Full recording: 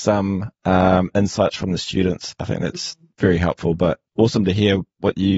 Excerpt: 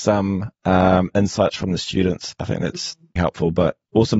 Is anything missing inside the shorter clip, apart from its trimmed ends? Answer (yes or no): yes